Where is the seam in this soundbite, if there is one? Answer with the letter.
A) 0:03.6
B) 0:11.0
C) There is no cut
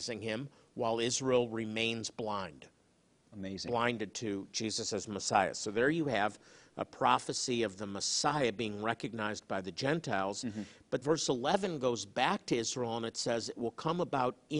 B